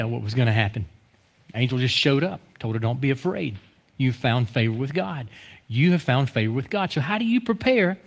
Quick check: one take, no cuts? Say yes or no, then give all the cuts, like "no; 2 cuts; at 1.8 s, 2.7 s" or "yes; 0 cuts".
yes; 0 cuts